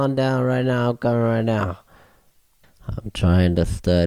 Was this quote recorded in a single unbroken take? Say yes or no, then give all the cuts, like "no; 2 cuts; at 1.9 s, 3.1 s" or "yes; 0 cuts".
yes; 0 cuts